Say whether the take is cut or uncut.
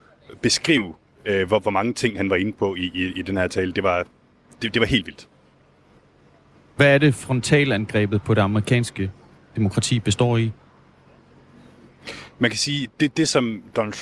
uncut